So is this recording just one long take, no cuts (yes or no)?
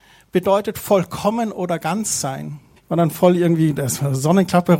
no